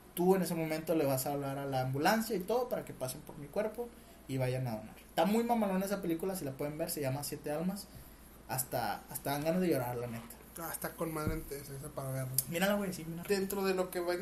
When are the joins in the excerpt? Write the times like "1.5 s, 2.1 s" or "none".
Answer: 11.7 s, 13.2 s